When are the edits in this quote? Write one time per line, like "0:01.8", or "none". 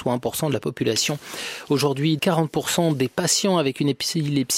0:02.2